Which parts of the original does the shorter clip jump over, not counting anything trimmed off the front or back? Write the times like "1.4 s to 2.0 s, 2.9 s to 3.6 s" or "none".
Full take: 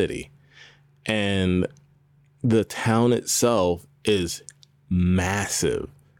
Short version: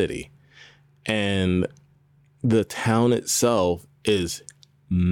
none